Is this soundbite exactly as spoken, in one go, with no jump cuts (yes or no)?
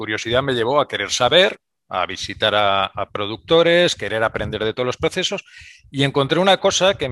yes